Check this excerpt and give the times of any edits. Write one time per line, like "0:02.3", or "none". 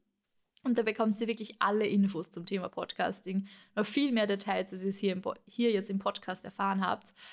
none